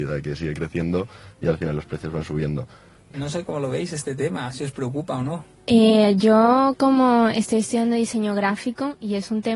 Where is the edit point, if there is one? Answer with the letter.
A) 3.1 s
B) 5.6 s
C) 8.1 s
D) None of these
A